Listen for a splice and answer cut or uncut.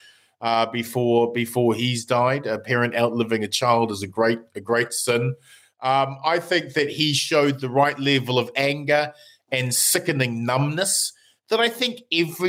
uncut